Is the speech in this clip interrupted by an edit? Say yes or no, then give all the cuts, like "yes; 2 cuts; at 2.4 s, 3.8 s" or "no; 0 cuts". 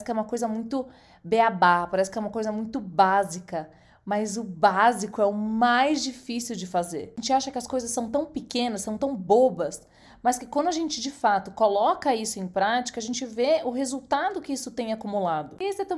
no; 0 cuts